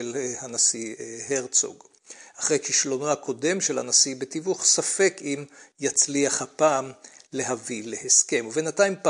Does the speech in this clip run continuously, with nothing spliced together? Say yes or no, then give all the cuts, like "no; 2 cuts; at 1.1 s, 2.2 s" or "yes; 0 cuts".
yes; 0 cuts